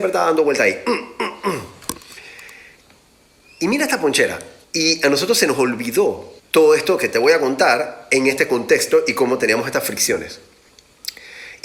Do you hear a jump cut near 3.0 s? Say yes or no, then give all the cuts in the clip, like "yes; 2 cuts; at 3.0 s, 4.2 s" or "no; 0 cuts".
no; 2 cuts; at 4.6 s, 6.4 s